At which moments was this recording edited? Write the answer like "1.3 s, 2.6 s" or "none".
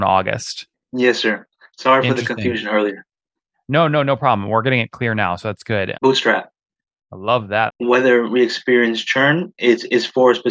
5.9 s, 7.7 s

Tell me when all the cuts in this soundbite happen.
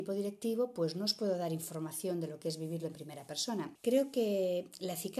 3.8 s

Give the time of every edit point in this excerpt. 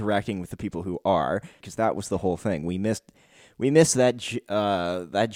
1.6 s

